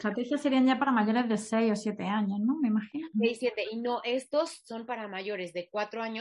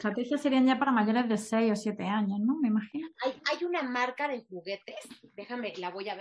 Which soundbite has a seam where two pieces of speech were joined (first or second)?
first